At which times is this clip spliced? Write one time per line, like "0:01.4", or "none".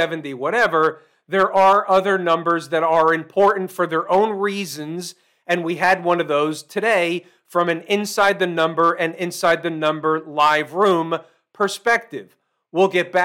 none

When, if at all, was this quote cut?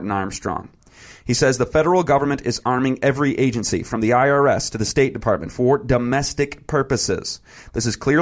none

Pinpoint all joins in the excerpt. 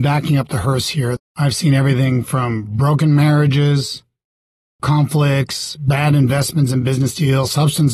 0:01.2

